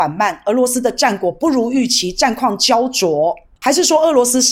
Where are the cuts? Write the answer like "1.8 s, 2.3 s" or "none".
3.6 s